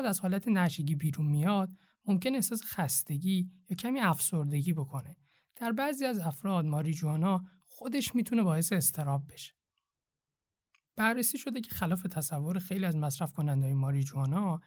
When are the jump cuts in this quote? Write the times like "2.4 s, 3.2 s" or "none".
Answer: none